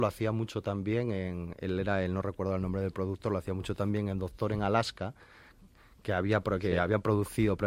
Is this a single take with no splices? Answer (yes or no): yes